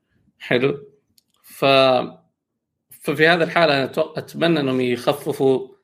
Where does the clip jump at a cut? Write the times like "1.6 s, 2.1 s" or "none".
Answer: none